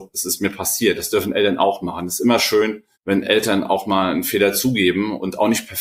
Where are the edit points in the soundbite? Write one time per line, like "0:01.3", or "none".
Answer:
0:02.9